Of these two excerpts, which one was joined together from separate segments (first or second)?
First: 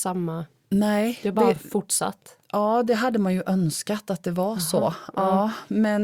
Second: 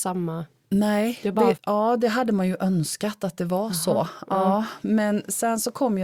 second